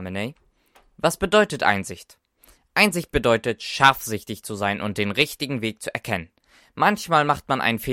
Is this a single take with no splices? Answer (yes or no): yes